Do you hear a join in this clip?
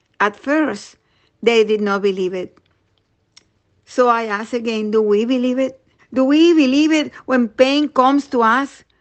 yes; 1 cut; at 6.0 s

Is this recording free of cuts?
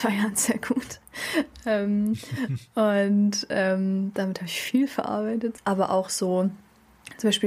no; 1 cut; at 5.6 s

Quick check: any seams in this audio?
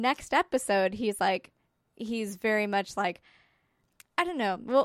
no; 0 cuts

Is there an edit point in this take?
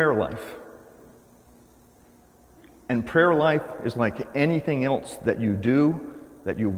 no; 0 cuts

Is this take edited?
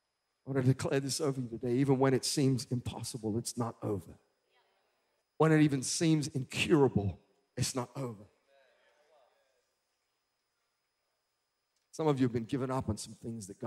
yes; 1 cut; at 5.2 s

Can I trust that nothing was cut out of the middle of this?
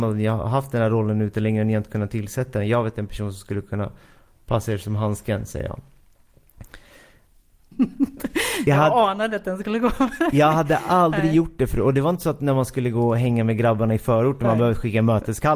no; 1 cut; at 7.7 s

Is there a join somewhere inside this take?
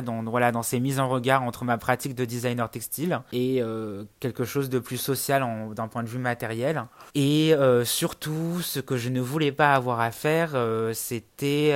yes; 1 cut; at 7.1 s

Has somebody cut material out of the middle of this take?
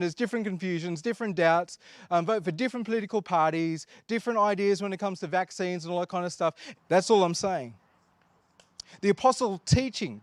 yes; 1 cut; at 6.7 s

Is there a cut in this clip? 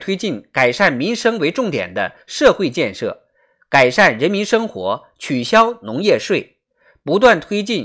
no; 0 cuts

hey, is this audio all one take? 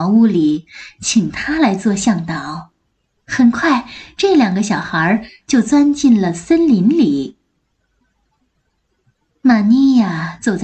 yes; 0 cuts

